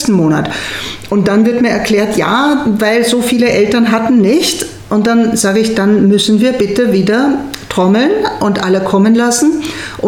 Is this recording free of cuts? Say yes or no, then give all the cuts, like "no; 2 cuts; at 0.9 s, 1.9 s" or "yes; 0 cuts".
yes; 0 cuts